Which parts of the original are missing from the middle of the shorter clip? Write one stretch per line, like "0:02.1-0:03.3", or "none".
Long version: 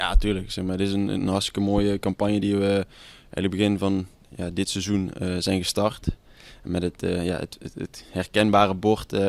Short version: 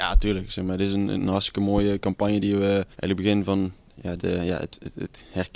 0:02.9-0:03.3
0:04.5-0:07.0